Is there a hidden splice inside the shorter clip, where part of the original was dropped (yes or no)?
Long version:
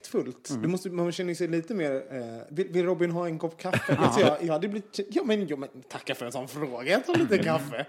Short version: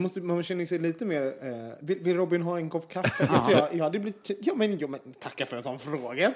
no